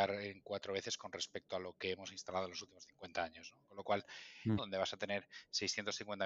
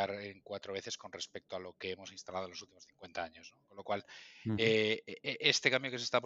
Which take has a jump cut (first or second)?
first